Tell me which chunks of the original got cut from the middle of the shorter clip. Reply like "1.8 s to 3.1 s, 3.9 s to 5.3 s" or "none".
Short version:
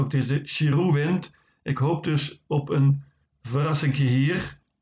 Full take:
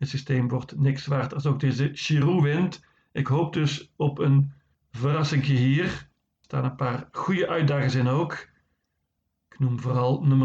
none